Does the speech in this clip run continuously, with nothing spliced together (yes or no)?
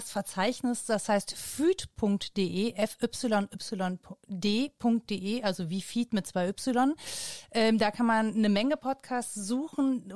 yes